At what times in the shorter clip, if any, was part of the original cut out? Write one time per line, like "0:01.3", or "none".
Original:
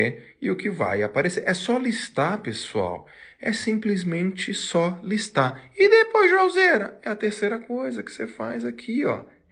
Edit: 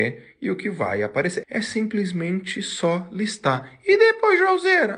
0:01.4